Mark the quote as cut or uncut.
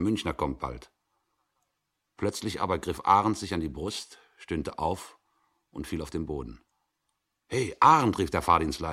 uncut